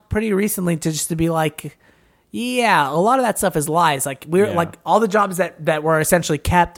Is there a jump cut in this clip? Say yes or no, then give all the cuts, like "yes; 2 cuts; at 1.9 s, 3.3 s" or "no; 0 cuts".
no; 0 cuts